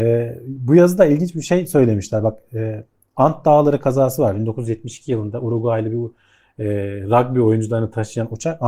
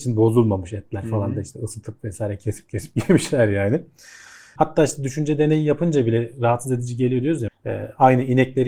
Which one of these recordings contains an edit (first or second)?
second